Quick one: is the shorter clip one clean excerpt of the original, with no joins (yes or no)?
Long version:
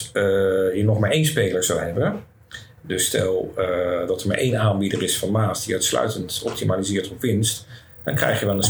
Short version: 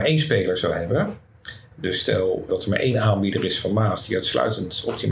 no